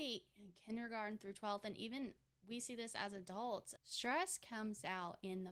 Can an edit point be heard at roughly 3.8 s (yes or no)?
yes